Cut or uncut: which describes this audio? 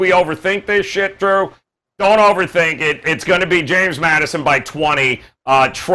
uncut